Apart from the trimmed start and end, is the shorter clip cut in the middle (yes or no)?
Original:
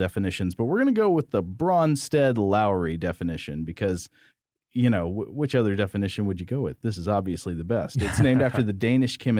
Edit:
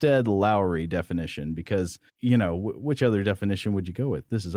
yes